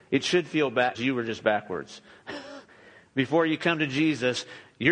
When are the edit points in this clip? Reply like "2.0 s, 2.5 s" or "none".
0.9 s